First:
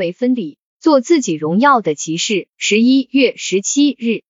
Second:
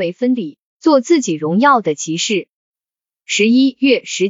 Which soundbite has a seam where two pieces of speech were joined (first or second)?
first